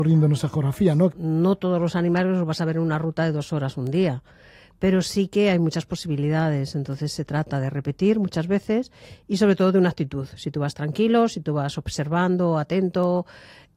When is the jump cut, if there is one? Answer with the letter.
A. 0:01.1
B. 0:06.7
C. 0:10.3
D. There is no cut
A